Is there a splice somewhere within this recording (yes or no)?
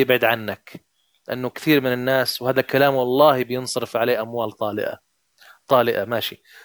no